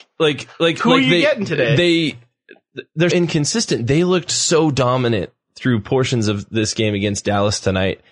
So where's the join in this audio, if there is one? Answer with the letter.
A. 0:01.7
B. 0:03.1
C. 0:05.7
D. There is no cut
B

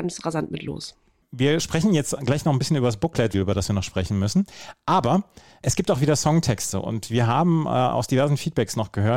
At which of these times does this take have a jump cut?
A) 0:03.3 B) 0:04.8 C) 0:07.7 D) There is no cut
A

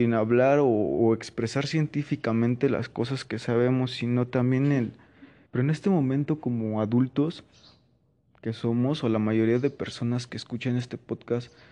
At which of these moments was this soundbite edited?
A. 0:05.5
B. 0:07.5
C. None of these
A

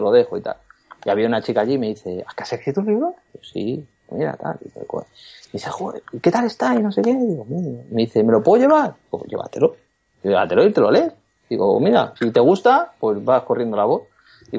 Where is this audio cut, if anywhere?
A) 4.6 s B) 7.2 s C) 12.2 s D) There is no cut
C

